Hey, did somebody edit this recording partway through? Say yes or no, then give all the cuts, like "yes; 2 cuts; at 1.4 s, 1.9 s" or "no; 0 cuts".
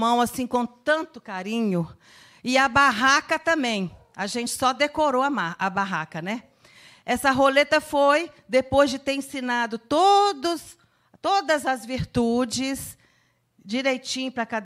no; 0 cuts